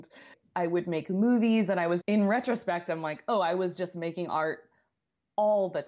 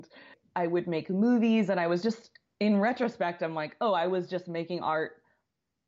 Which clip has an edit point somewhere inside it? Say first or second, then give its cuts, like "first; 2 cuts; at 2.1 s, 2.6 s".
first; 1 cut; at 2.0 s